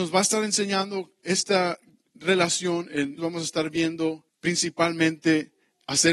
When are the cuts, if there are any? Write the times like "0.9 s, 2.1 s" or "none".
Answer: 3.2 s, 4.3 s